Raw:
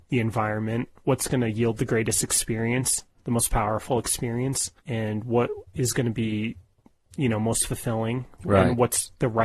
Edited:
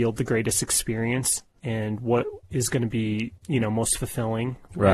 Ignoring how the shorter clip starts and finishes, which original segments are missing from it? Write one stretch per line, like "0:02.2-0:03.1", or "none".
0:03.2-0:04.8
0:06.6-0:07.1